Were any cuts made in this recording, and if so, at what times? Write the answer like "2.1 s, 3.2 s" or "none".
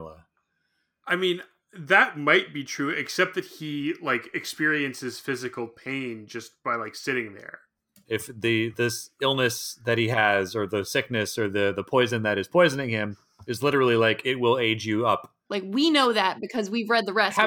8.0 s, 15.5 s